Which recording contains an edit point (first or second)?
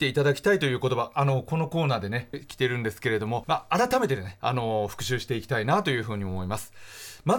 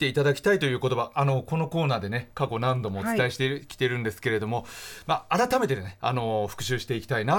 first